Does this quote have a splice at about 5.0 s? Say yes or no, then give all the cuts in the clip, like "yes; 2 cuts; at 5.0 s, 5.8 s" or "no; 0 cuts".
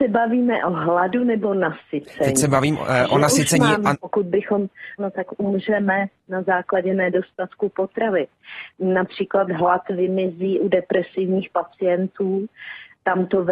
yes; 2 cuts; at 3.9 s, 5.0 s